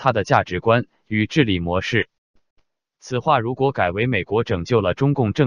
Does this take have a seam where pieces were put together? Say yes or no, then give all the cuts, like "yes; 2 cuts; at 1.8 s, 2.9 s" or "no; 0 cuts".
yes; 1 cut; at 2.5 s